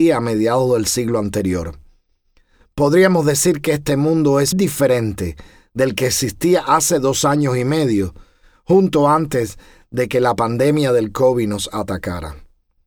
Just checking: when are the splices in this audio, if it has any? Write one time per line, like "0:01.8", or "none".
0:04.5